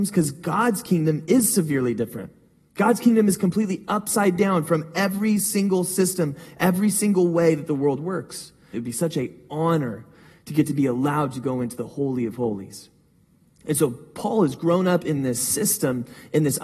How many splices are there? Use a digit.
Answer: 1